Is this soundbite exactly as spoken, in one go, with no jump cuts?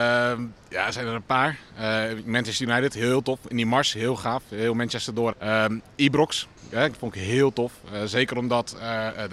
no; 2 cuts; at 5.3 s, 6.9 s

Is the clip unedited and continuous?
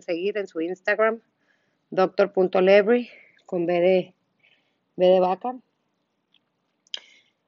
yes; 0 cuts

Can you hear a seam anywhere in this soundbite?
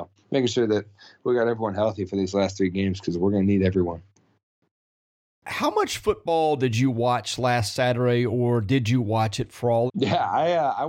yes; 1 cut; at 9.9 s

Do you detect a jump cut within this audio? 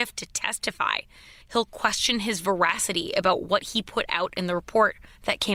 yes; 1 cut; at 1.4 s

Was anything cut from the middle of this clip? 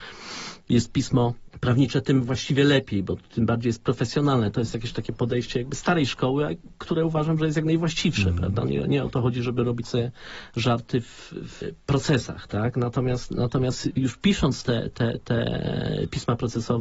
no; 0 cuts

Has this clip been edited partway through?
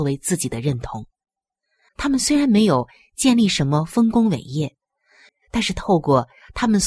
yes; 2 cuts; at 1.9 s, 5.3 s

